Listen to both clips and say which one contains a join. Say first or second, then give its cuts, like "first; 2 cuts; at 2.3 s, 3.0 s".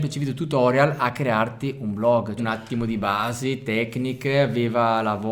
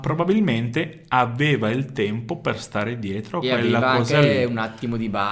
first; 1 cut; at 2.4 s